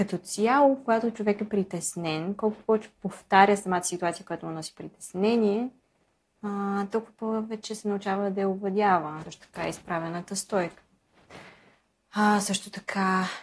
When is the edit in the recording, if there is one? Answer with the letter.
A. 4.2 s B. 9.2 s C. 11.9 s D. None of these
B